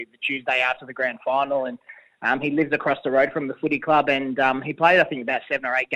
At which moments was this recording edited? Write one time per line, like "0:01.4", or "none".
none